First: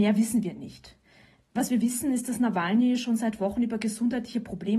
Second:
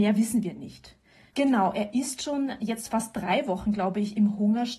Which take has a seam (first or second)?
second